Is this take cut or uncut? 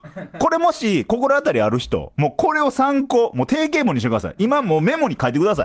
uncut